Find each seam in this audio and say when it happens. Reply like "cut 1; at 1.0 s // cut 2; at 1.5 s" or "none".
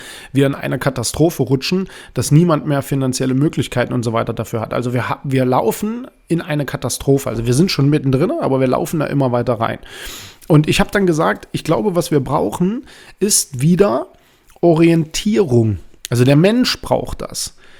none